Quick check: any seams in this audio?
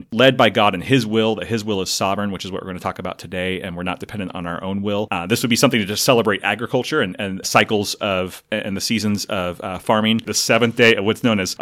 yes; 2 cuts; at 7.4 s, 10.2 s

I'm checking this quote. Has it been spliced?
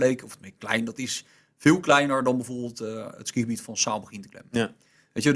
no; 0 cuts

